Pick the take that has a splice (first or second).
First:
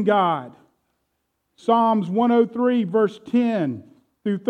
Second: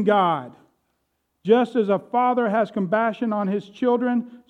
second